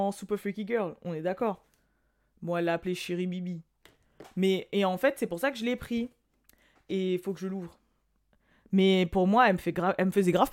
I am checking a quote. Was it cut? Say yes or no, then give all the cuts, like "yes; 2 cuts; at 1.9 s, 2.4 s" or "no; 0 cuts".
no; 0 cuts